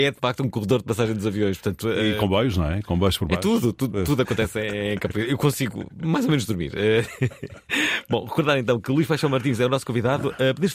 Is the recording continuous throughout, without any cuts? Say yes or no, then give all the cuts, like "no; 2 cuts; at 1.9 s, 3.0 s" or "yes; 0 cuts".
yes; 0 cuts